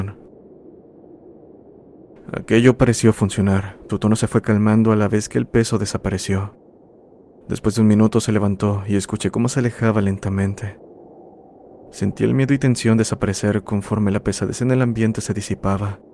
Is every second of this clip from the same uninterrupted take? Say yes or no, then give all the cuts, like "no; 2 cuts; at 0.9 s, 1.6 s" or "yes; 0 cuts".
no; 1 cut; at 3.9 s